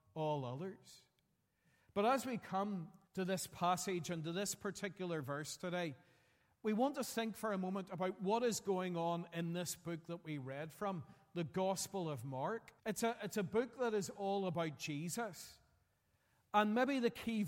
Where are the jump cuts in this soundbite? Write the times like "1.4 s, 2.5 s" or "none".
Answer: 3.1 s, 12.8 s